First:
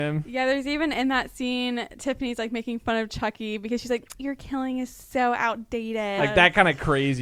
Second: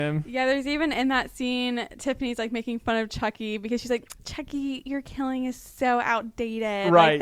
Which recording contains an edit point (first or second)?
first